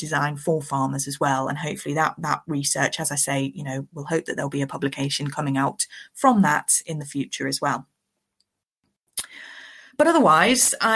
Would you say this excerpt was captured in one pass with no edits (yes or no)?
yes